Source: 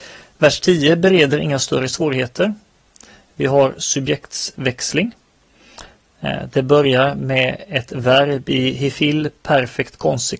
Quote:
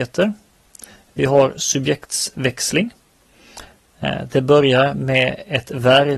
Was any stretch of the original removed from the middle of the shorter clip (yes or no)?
no